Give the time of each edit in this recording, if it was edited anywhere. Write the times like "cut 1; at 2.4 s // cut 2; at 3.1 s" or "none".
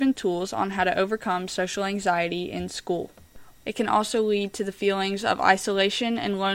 cut 1; at 3.6 s